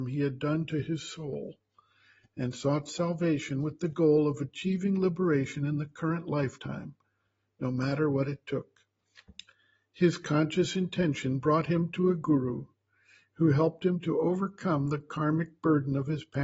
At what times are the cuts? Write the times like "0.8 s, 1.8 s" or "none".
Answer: none